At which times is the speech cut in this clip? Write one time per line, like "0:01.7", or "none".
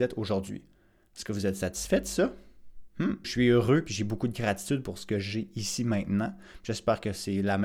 0:03.2